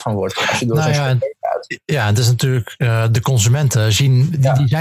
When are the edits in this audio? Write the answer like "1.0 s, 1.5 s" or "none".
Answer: none